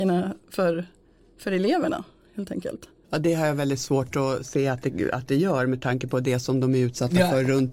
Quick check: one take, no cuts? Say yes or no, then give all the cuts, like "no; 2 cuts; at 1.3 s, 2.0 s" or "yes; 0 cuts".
yes; 0 cuts